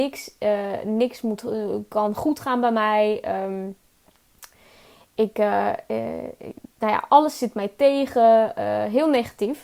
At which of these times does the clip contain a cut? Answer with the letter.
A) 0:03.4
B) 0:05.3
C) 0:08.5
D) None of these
D